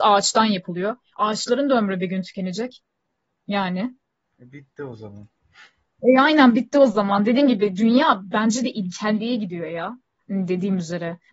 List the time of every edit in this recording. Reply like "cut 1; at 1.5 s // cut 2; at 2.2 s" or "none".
none

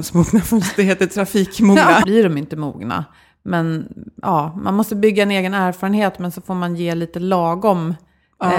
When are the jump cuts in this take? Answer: cut 1; at 2.0 s

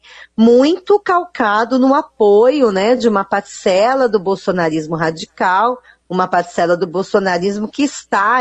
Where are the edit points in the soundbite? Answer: none

